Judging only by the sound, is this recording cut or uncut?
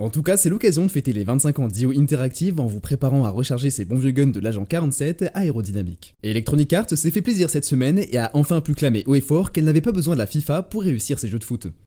cut